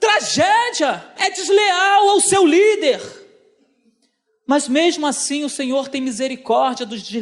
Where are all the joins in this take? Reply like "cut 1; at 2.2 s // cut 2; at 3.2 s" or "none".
cut 1; at 1.2 s

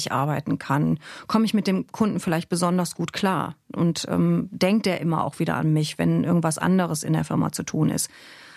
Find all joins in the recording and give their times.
none

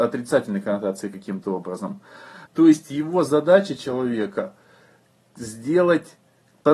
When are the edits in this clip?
cut 1; at 2.5 s

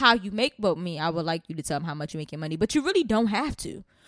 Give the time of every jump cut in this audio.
none

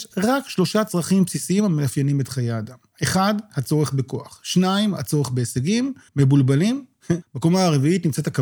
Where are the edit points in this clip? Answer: cut 1; at 6.1 s // cut 2; at 7.2 s

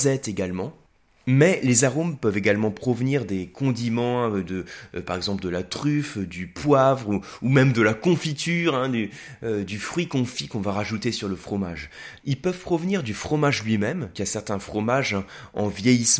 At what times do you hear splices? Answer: cut 1; at 12.2 s // cut 2; at 14.1 s

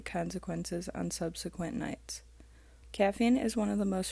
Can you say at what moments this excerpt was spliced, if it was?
cut 1; at 2.8 s

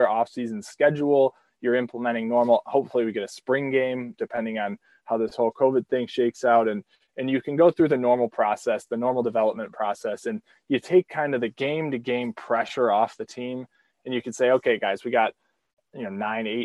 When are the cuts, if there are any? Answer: none

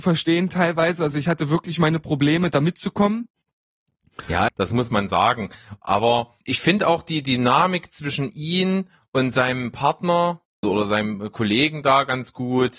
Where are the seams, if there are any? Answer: cut 1; at 4.5 s // cut 2; at 6.4 s // cut 3; at 10.6 s

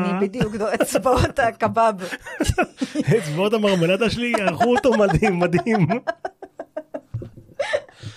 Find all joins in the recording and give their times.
none

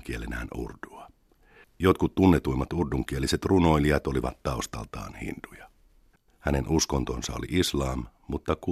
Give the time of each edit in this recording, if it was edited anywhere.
cut 1; at 1.6 s // cut 2; at 6.3 s

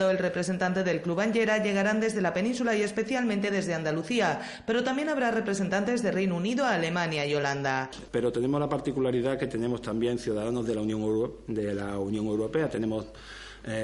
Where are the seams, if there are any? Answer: cut 1; at 8.1 s

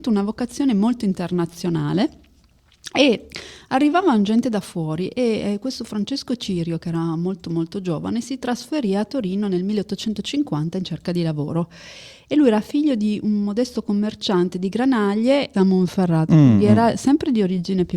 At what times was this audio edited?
cut 1; at 15.5 s

